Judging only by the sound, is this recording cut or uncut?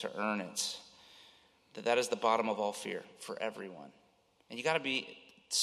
uncut